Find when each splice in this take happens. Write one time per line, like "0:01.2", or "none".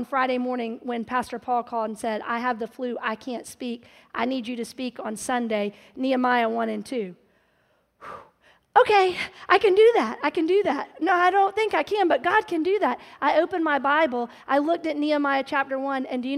none